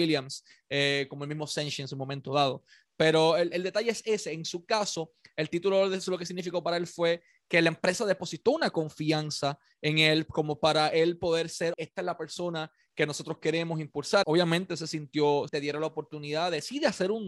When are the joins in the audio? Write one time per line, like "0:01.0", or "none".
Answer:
0:11.7
0:14.2
0:15.5